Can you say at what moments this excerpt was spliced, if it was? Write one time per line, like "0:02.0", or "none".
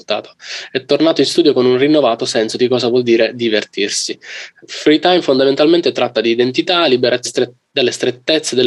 0:07.2